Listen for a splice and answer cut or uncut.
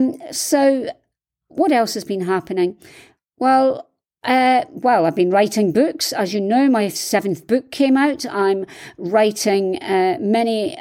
uncut